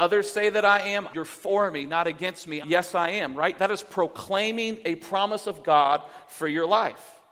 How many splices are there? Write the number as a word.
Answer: two